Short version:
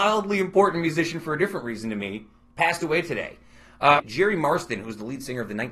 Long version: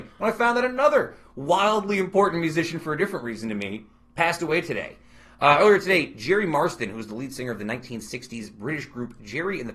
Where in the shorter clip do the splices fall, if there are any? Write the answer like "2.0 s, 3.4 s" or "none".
4.0 s